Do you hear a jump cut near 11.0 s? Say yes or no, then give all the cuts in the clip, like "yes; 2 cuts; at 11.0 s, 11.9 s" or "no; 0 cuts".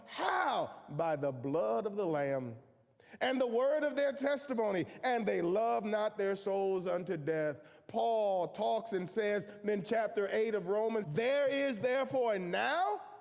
yes; 1 cut; at 11.0 s